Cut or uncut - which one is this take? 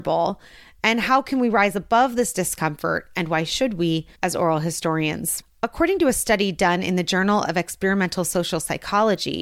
cut